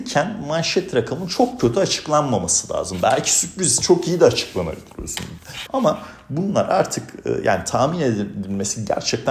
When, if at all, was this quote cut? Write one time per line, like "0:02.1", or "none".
0:05.7